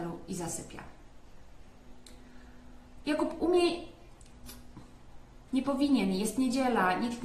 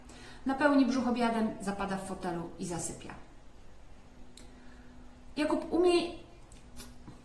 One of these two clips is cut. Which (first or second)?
first